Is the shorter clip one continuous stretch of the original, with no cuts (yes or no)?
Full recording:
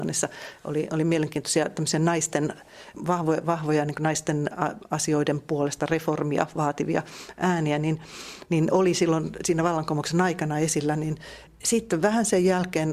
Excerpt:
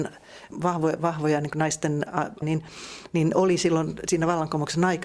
no